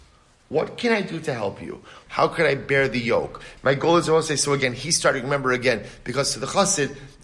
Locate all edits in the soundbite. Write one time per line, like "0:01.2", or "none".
0:02.1
0:03.6